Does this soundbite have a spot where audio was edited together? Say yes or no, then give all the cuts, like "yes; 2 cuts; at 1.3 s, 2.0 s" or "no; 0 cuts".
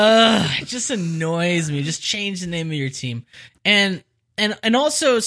no; 0 cuts